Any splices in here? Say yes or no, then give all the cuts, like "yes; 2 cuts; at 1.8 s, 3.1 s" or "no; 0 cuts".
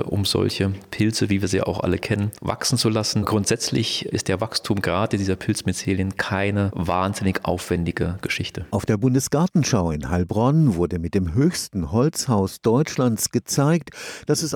no; 0 cuts